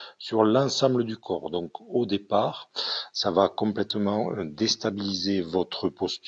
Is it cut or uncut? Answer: uncut